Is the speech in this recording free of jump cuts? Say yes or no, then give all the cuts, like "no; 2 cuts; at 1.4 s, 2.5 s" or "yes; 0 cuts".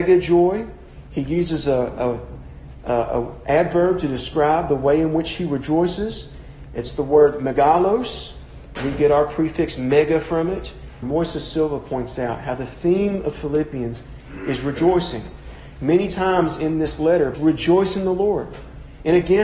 no; 2 cuts; at 11.0 s, 17.3 s